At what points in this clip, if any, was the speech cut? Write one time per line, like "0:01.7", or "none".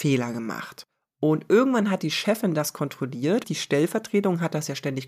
0:03.4